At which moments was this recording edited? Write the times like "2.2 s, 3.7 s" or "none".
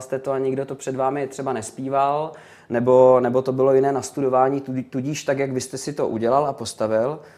none